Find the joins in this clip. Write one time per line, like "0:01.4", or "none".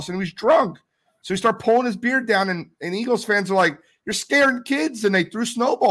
none